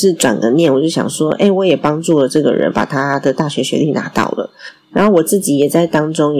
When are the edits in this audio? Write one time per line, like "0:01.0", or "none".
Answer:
none